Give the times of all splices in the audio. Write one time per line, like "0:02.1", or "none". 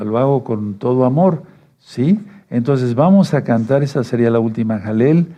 none